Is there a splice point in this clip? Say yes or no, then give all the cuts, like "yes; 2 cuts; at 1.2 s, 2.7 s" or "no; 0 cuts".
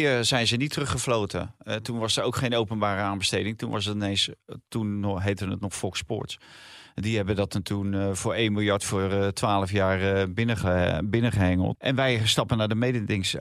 yes; 1 cut; at 11.7 s